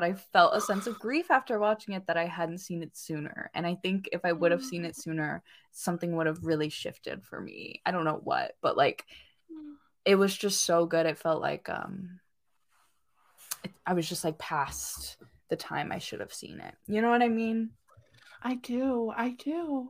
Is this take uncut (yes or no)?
yes